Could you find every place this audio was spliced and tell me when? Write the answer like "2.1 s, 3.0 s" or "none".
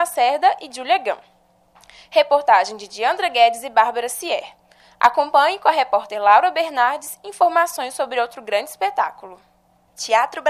none